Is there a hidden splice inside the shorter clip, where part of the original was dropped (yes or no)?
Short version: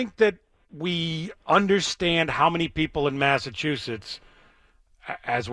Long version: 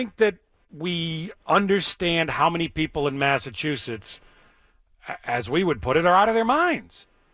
no